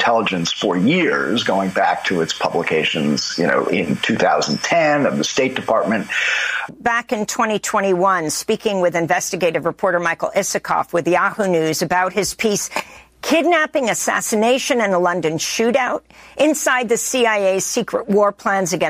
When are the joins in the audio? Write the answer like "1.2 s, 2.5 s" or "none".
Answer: 3.7 s, 6.7 s